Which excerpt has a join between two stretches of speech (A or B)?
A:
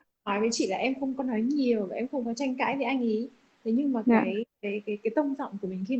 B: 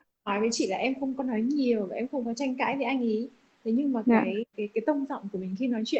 B